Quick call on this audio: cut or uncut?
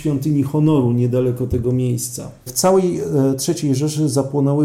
cut